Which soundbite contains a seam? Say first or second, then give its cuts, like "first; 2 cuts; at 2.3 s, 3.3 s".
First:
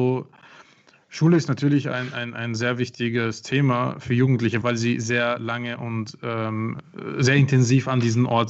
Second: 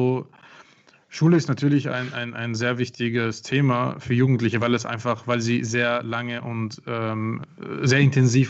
first; 1 cut; at 4.6 s